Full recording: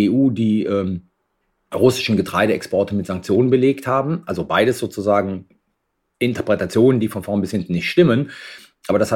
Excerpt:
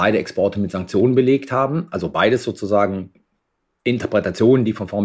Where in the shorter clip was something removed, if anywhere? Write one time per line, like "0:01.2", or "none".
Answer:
none

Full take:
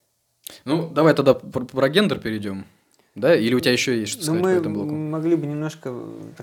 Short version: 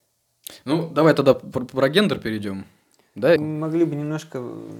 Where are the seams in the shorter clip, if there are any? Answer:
0:03.4

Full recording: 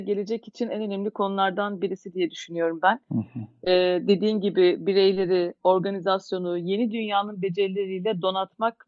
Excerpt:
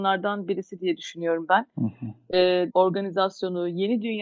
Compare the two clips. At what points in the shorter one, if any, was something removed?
0:02.7

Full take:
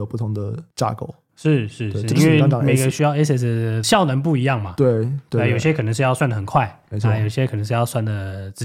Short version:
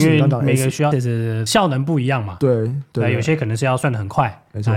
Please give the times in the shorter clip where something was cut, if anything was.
0:00.9

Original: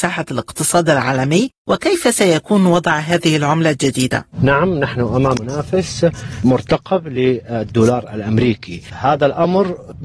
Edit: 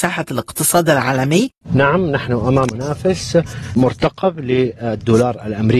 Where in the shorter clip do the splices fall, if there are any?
0:01.6

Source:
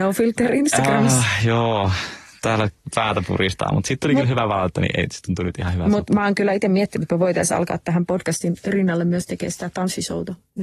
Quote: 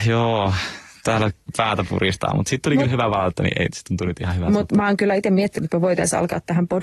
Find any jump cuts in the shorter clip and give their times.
none

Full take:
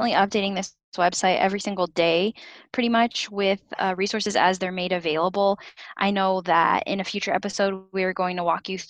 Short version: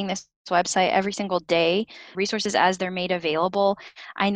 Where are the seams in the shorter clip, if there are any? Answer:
0:02.1

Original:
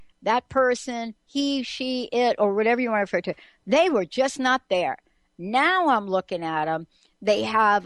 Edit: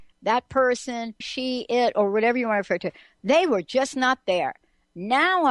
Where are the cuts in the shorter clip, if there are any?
0:01.2

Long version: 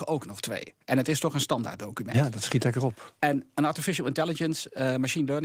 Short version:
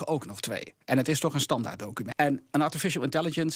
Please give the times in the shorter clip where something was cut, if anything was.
0:02.1

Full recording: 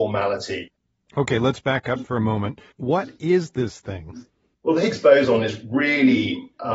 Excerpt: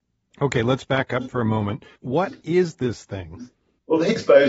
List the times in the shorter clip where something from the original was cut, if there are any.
none

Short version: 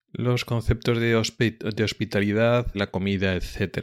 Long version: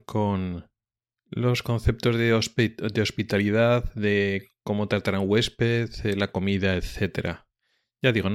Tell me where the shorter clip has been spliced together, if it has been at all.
0:02.7

